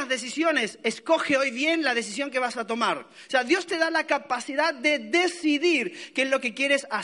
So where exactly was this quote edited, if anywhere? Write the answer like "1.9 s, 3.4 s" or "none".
none